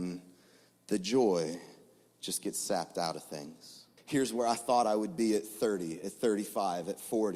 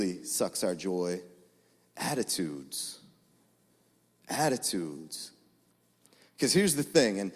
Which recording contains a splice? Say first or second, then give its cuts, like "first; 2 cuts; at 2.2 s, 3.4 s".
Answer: first; 1 cut; at 4.0 s